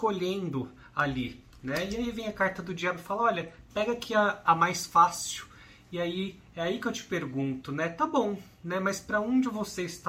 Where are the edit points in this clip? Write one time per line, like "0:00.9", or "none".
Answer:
0:04.4